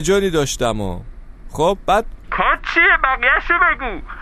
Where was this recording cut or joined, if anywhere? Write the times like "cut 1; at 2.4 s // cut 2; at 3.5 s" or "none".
cut 1; at 2.2 s